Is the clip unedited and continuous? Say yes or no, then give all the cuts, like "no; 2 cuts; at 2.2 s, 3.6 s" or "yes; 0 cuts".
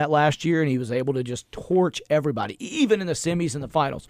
yes; 0 cuts